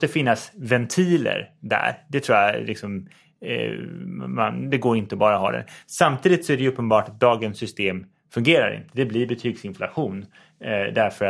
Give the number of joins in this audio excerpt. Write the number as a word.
zero